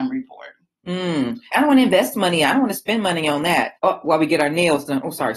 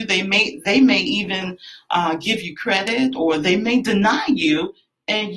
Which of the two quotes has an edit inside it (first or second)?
first